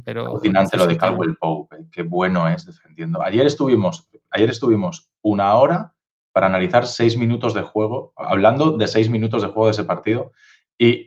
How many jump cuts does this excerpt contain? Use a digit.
1